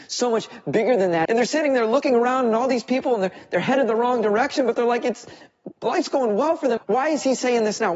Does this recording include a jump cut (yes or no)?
yes